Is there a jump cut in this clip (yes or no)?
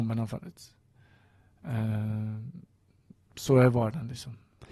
no